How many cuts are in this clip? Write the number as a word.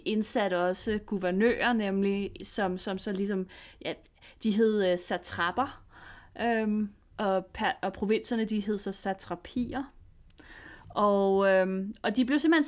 two